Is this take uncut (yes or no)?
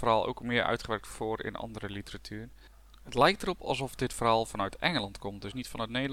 yes